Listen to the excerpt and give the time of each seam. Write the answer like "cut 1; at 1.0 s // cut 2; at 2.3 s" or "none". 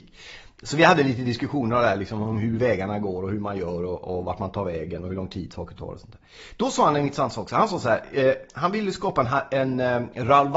none